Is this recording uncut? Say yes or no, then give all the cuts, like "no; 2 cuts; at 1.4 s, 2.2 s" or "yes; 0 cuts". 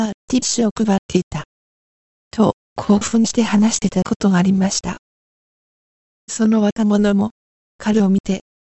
yes; 0 cuts